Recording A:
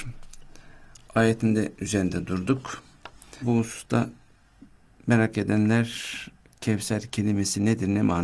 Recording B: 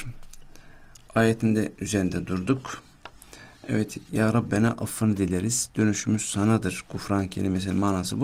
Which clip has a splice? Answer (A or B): A